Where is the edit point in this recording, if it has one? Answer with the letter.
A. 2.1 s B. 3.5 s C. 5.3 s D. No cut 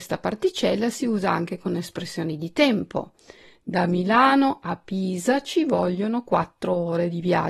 D